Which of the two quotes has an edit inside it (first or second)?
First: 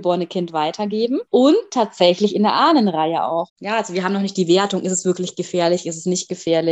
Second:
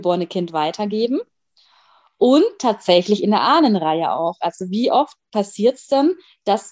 first